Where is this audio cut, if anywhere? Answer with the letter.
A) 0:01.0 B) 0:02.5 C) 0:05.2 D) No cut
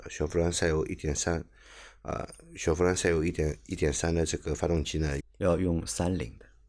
C